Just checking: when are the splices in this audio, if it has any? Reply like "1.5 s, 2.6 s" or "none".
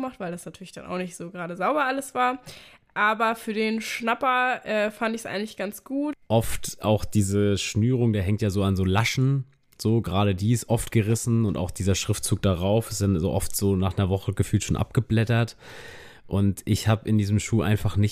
6.1 s